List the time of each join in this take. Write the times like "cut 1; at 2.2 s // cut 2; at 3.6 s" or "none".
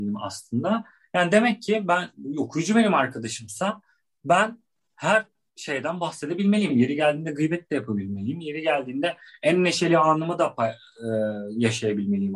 cut 1; at 6.7 s